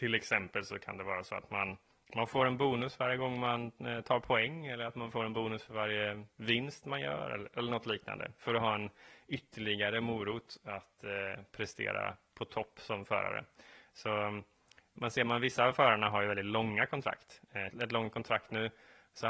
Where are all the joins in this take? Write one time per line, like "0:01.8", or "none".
0:17.7